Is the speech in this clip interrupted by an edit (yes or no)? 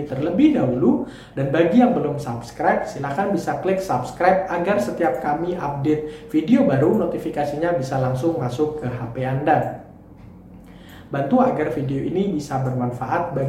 yes